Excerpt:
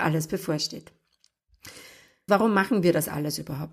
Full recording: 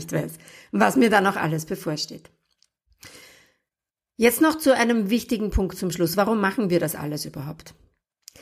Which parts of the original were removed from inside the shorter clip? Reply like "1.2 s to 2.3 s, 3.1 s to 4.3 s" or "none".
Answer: 3.7 s to 6.2 s